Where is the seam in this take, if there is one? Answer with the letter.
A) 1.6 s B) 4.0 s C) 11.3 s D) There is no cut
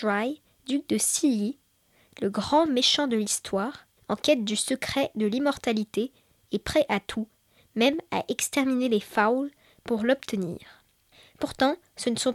B